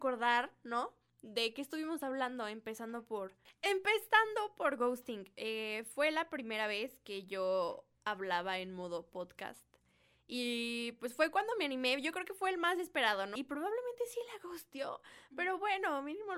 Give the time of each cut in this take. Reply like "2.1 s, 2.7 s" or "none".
13.4 s